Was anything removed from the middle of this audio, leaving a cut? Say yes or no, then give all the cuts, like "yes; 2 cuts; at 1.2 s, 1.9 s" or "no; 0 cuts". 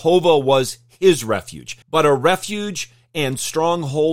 yes; 1 cut; at 1.8 s